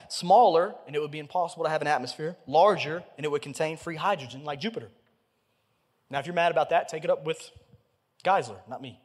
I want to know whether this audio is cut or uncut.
uncut